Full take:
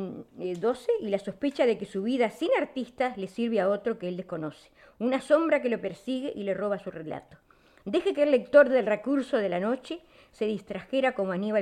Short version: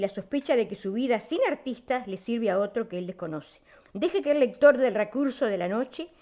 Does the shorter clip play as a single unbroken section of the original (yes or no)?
no